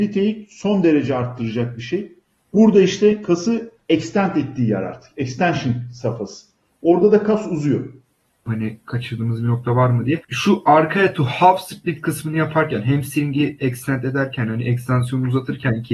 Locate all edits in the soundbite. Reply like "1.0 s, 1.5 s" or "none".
8.5 s, 10.2 s